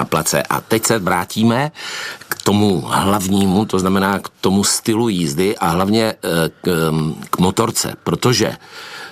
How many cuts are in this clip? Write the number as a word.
zero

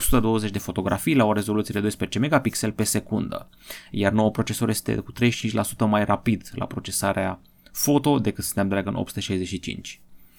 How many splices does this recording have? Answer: zero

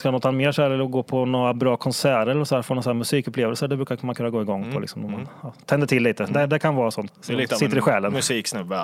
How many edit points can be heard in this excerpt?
one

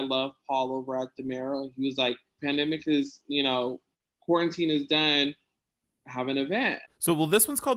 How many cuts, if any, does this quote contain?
two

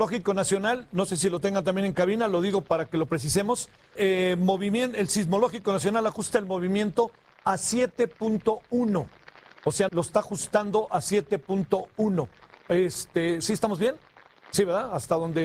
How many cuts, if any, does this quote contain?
two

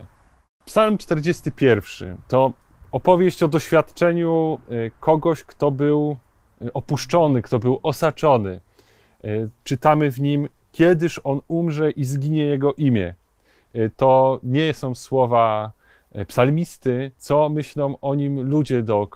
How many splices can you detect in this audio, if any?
one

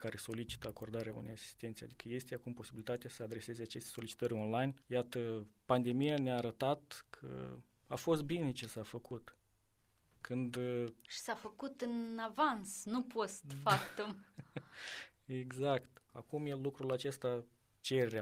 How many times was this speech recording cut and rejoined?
two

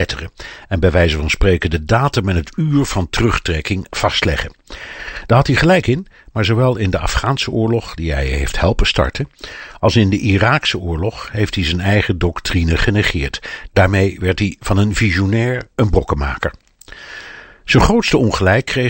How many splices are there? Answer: zero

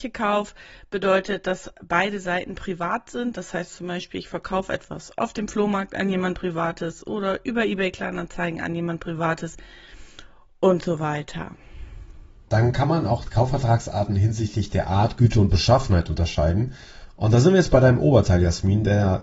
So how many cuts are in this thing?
one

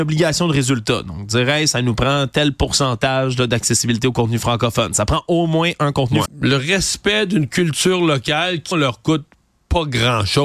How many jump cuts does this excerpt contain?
two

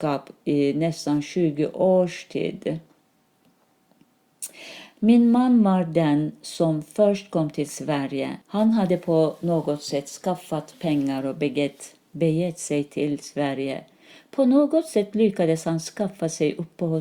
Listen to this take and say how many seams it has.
one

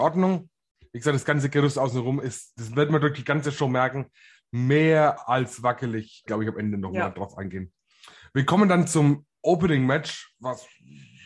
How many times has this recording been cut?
one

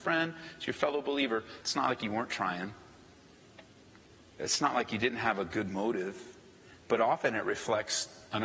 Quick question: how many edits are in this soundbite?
one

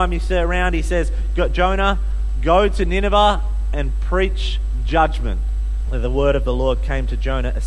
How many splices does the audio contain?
one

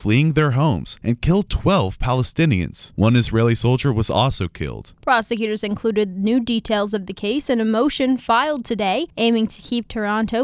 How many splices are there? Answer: one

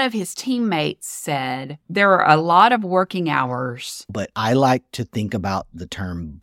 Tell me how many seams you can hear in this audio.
one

